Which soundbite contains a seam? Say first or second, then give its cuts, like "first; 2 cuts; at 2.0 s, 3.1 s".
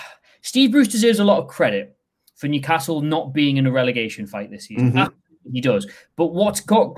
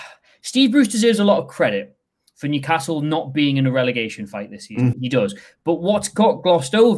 second; 1 cut; at 4.9 s